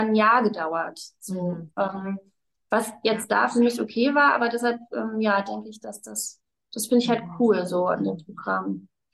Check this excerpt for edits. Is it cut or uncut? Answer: uncut